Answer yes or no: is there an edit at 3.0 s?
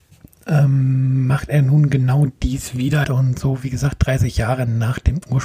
yes